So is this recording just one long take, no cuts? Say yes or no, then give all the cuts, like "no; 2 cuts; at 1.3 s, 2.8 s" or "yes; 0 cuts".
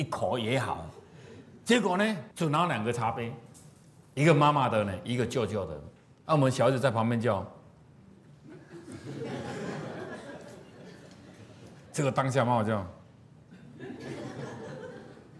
no; 2 cuts; at 2.3 s, 11.9 s